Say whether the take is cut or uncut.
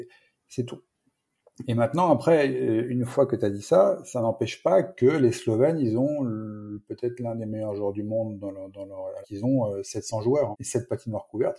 cut